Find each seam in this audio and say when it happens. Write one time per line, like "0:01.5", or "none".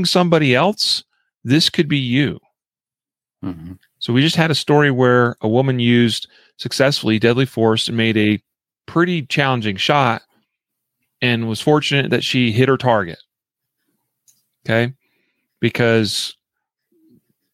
none